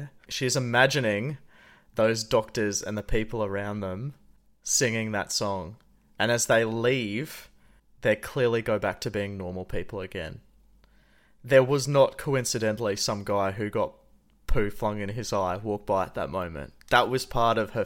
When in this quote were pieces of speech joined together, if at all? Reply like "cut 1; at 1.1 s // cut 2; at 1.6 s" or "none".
none